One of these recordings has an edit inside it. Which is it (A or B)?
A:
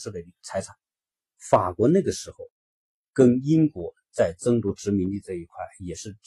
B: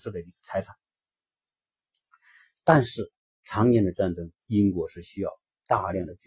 A